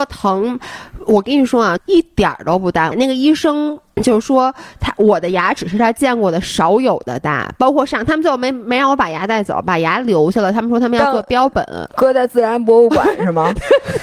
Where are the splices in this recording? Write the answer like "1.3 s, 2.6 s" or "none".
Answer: 1.8 s, 2.9 s